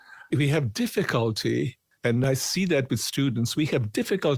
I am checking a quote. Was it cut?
no; 0 cuts

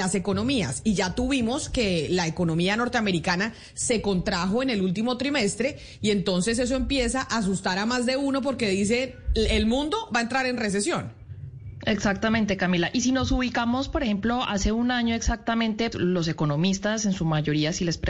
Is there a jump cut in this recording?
yes; 1 cut; at 15.9 s

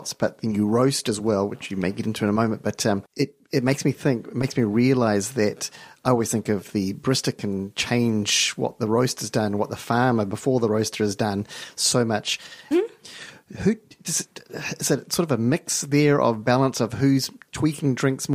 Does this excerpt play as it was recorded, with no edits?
no; 1 cut; at 12.7 s

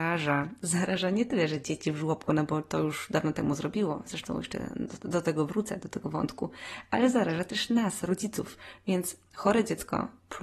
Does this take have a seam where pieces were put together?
no; 0 cuts

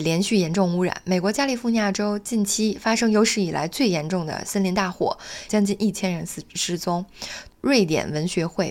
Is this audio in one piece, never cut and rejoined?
no; 2 cuts; at 5.5 s, 7.5 s

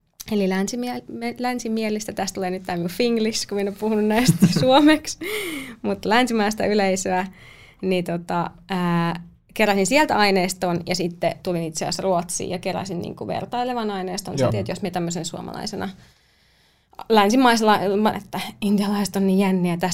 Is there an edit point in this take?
yes; 2 cuts; at 14.5 s, 18.1 s

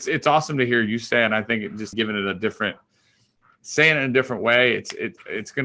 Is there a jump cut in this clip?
yes; 1 cut; at 1.9 s

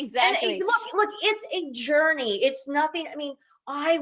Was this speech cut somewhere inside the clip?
no; 0 cuts

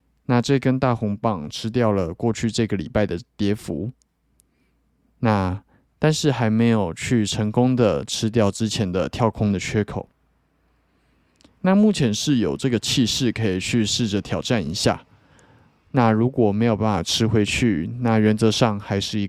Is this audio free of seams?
yes; 0 cuts

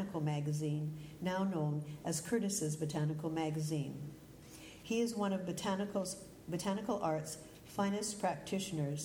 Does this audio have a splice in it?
yes; 1 cut; at 4.8 s

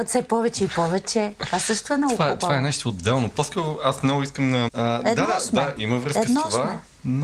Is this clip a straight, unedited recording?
no; 2 cuts; at 4.7 s, 5.8 s

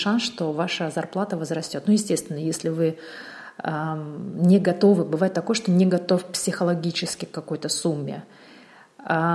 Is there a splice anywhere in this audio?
no; 0 cuts

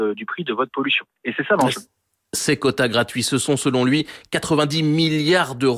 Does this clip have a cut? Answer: no; 0 cuts

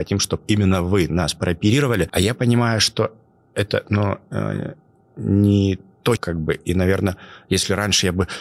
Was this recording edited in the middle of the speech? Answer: yes; 1 cut; at 6.2 s

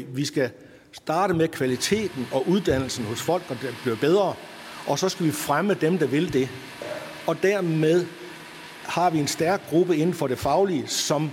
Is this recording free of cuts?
yes; 0 cuts

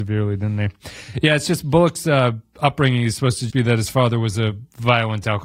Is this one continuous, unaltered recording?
no; 1 cut; at 3.5 s

